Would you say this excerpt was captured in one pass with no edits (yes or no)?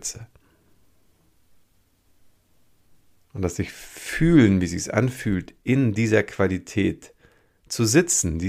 yes